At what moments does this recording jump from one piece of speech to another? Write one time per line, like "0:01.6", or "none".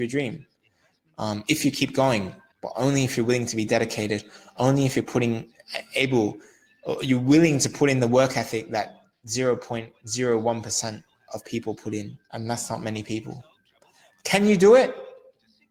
0:02.5
0:12.2